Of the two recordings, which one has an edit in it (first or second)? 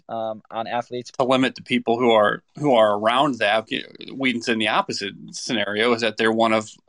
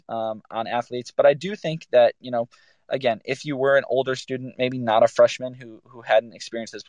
first